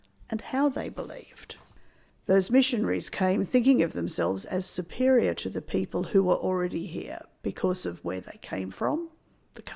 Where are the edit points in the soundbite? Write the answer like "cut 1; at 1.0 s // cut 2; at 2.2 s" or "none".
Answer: cut 1; at 2.1 s